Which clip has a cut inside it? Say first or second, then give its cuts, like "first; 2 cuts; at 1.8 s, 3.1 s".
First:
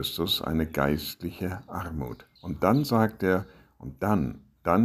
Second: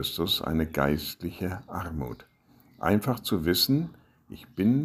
first; 1 cut; at 2.4 s